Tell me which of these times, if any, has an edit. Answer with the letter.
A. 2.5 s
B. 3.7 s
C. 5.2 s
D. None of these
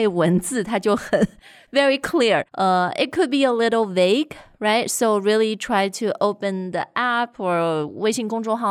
A